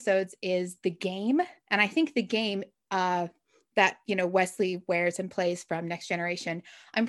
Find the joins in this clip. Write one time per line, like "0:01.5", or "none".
none